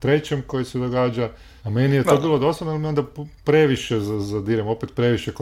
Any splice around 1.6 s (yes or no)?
yes